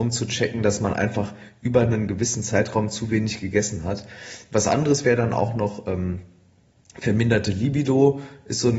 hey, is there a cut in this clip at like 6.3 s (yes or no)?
no